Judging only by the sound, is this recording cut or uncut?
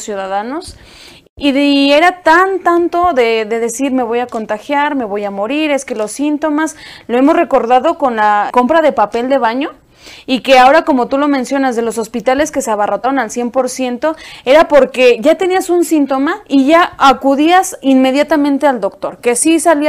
cut